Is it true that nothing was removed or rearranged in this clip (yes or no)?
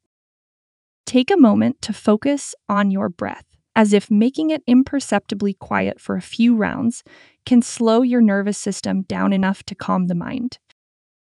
no